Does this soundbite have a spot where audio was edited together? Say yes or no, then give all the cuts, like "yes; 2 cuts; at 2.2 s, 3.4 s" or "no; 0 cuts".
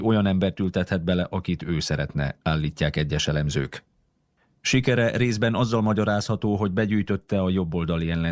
no; 0 cuts